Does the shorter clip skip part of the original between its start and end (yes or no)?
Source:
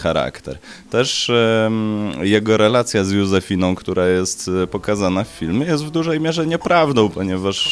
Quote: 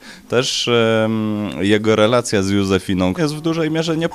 yes